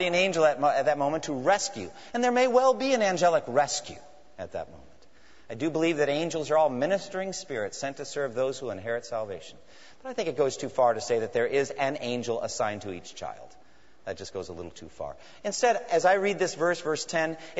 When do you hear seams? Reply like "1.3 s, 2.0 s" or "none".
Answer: none

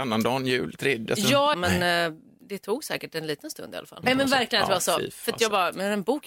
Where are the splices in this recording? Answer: 1.5 s, 4.0 s

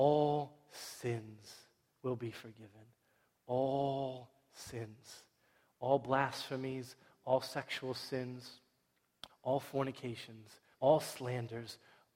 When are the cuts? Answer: 9.3 s, 10.7 s

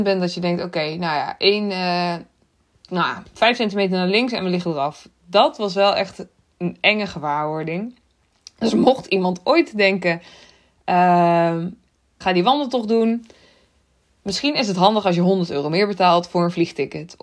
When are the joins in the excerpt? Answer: 12.2 s

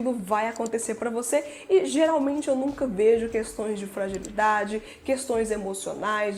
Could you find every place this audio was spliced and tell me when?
none

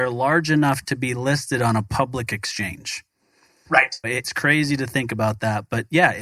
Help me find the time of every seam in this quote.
4.0 s

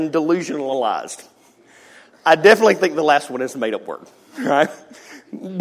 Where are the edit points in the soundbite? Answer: none

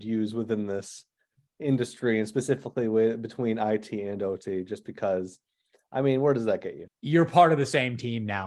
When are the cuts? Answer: 6.9 s

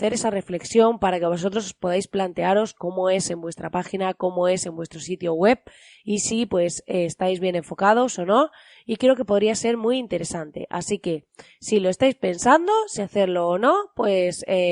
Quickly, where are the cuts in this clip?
none

